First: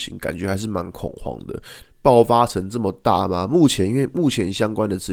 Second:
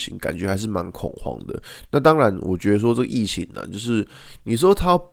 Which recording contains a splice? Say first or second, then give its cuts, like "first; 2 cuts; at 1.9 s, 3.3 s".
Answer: first; 1 cut; at 1.8 s